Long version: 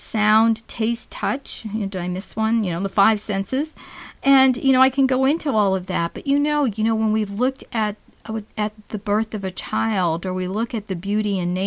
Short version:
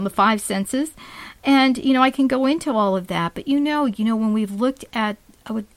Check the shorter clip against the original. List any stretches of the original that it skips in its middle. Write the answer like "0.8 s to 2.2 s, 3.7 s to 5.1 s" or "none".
none